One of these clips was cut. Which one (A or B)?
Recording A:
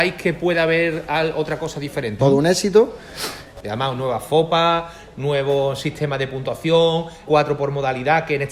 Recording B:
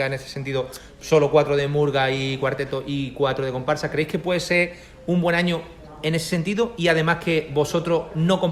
A